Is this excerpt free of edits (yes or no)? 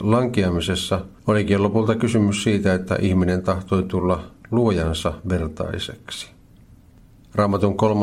yes